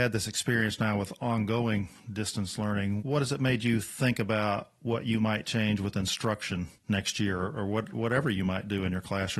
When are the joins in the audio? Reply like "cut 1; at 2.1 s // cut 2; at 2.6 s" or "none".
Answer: none